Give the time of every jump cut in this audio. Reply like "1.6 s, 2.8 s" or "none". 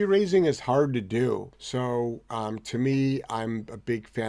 1.5 s